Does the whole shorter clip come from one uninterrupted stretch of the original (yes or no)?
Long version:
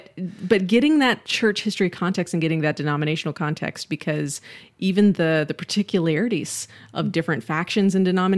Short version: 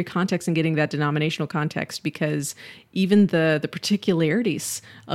yes